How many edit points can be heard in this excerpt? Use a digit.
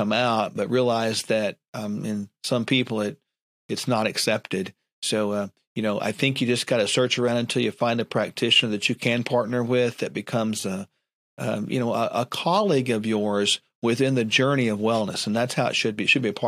0